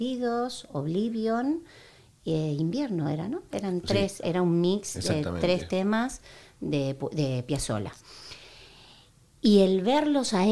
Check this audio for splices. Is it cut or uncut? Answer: cut